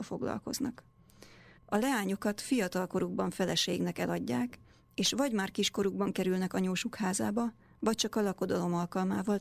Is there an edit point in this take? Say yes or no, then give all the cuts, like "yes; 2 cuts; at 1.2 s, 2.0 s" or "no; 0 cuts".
yes; 1 cut; at 1.6 s